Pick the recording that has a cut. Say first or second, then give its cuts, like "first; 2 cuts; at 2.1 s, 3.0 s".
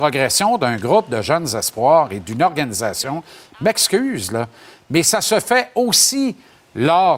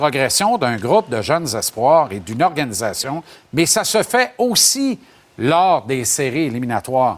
second; 1 cut; at 3.3 s